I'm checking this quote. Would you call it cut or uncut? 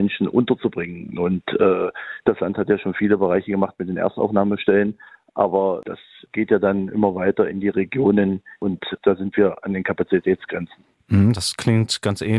uncut